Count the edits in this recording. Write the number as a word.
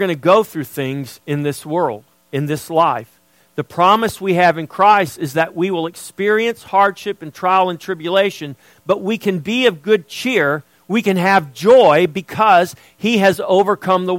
zero